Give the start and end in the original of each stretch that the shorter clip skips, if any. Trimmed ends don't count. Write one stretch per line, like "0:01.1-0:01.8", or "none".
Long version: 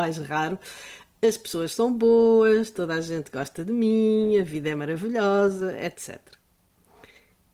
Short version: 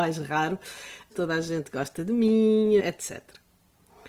0:01.1-0:02.7
0:04.4-0:05.8